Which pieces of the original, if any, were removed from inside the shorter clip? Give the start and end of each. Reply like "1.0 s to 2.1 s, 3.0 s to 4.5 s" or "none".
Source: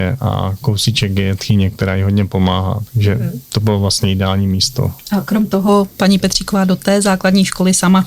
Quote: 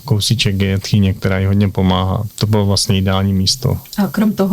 2.9 s to 3.4 s